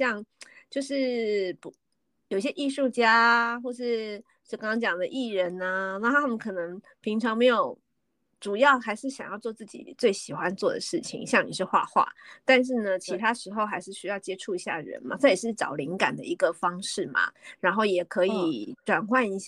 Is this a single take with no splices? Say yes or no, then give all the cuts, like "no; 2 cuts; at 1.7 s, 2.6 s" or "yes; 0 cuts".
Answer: yes; 0 cuts